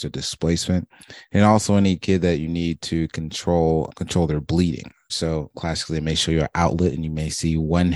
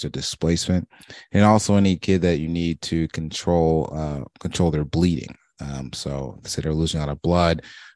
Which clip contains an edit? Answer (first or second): first